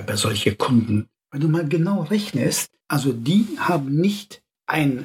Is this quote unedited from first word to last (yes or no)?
no